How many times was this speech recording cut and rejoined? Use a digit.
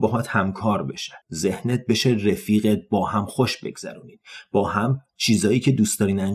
1